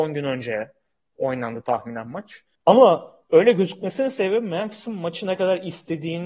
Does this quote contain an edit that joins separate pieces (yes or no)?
yes